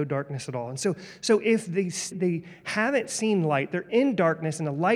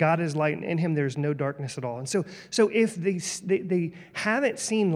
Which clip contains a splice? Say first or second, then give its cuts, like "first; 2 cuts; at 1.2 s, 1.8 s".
first; 1 cut; at 2.1 s